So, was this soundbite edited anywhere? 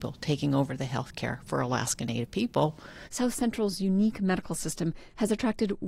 yes; 1 cut; at 3.1 s

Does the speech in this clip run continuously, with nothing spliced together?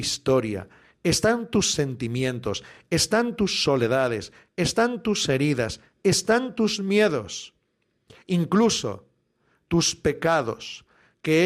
yes; 0 cuts

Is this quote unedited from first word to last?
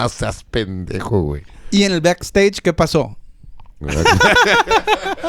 no; 1 cut; at 3.8 s

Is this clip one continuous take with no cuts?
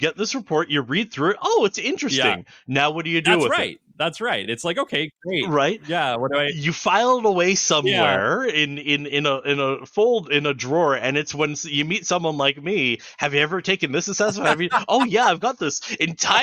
yes; 0 cuts

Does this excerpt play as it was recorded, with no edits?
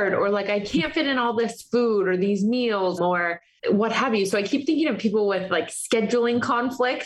no; 1 cut; at 3.0 s

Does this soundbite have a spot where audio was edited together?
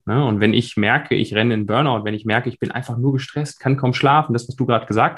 no; 0 cuts

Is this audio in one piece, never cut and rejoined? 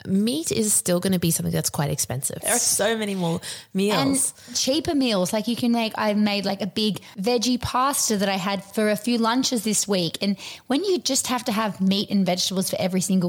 no; 1 cut; at 2.4 s

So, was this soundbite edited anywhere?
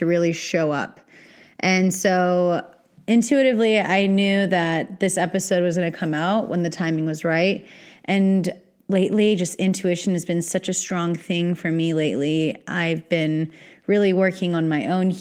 no; 0 cuts

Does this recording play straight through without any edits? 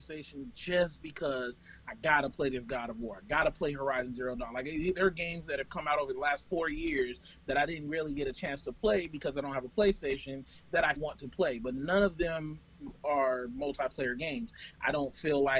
no; 1 cut; at 11.0 s

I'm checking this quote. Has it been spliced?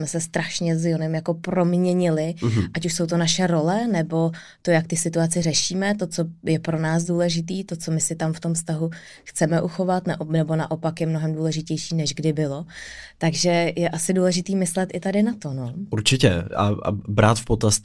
no; 0 cuts

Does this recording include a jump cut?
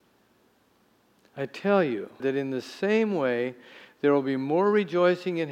yes; 1 cut; at 2.2 s

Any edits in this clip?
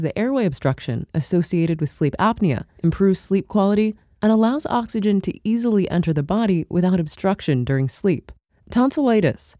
no; 0 cuts

